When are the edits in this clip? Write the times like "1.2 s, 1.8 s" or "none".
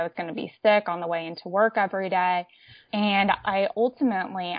none